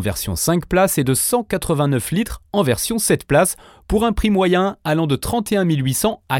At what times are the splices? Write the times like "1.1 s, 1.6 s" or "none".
none